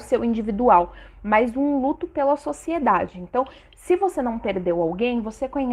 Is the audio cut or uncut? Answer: uncut